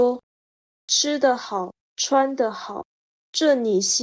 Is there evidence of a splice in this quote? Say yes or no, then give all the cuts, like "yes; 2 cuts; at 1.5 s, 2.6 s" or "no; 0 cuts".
no; 0 cuts